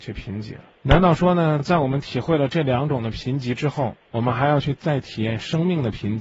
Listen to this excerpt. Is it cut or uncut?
uncut